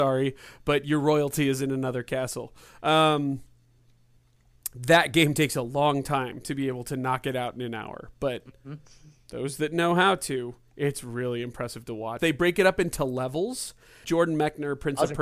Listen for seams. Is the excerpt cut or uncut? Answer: cut